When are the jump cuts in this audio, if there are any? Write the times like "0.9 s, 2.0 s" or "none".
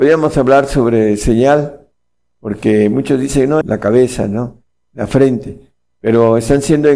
3.6 s